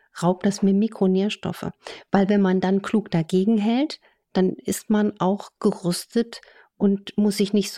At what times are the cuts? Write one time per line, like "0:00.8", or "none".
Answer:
none